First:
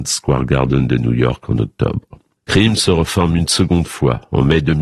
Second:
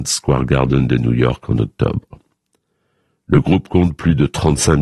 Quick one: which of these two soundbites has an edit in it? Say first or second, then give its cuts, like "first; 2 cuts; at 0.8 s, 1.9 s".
first; 1 cut; at 2.4 s